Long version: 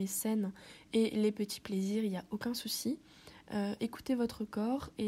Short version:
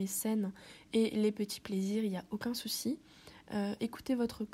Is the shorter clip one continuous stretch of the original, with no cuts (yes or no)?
yes